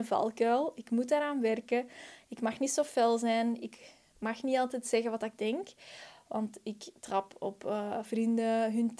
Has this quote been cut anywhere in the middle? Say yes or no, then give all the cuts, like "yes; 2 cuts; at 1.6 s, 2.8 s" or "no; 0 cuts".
yes; 1 cut; at 8.0 s